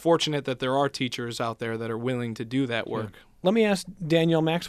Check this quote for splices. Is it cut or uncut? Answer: uncut